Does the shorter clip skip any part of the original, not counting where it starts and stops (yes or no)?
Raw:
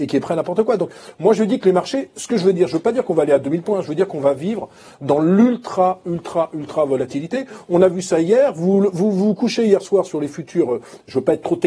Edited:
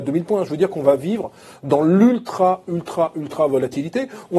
no